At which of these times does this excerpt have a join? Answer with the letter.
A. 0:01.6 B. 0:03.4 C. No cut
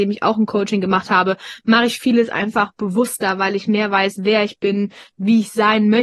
C